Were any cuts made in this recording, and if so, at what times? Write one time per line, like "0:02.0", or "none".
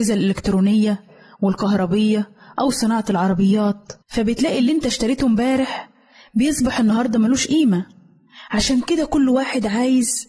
0:04.0